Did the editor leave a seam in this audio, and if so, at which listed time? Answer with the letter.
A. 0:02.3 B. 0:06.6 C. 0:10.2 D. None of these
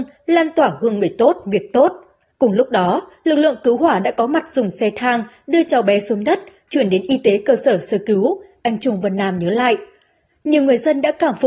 A